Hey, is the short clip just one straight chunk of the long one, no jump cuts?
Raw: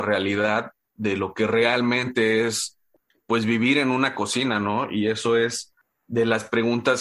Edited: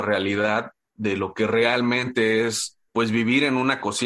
no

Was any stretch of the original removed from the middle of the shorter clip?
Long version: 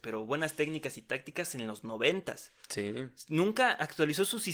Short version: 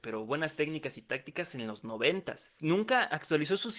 yes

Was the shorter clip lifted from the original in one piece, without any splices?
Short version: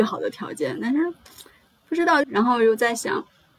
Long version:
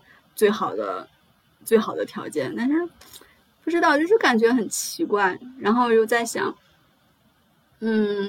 no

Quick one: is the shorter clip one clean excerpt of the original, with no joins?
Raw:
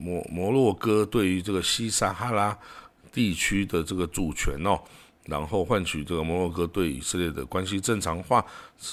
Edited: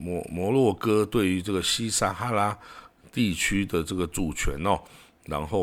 yes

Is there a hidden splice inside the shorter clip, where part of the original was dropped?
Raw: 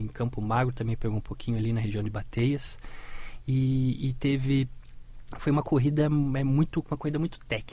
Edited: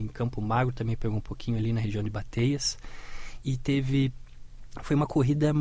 yes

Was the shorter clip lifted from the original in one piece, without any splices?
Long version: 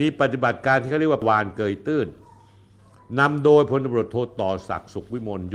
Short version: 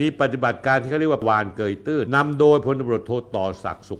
no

